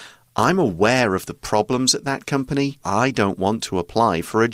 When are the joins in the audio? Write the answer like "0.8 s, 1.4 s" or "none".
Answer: 2.8 s